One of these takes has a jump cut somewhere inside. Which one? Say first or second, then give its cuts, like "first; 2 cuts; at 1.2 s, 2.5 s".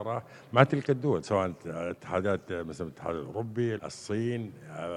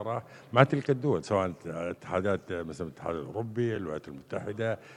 first; 1 cut; at 3.8 s